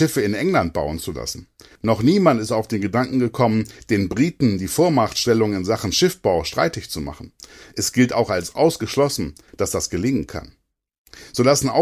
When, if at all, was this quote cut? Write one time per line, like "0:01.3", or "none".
none